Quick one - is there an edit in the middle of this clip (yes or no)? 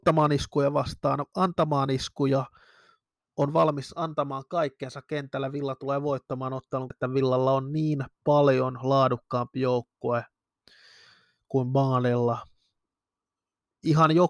yes